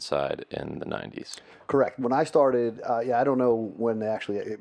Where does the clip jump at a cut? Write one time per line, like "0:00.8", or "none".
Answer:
none